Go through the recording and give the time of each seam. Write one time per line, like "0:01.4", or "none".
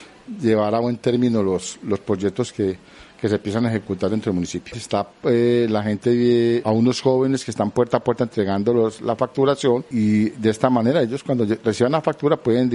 0:04.7
0:06.6